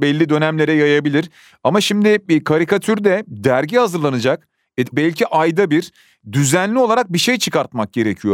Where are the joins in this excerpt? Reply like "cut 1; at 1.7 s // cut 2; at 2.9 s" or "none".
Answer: cut 1; at 4.9 s